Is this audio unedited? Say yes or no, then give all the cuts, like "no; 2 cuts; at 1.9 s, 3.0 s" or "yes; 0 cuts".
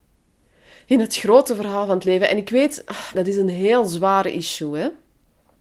no; 1 cut; at 3.1 s